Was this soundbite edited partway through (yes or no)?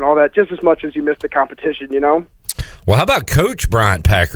no